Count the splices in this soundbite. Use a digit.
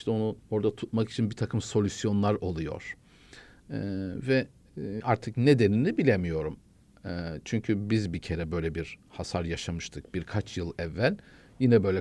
1